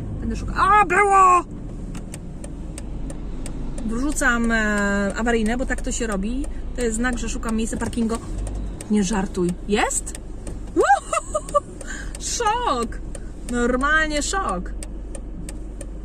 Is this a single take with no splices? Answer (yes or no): yes